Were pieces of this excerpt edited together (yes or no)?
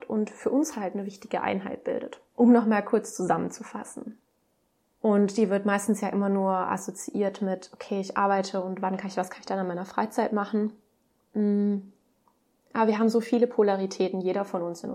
yes